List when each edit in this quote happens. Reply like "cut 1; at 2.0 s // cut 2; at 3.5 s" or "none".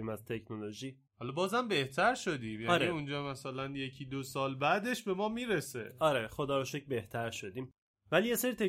cut 1; at 1.1 s